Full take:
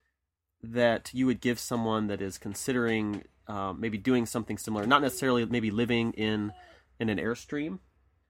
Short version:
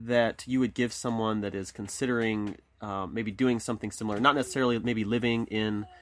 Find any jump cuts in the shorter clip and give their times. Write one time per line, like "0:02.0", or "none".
none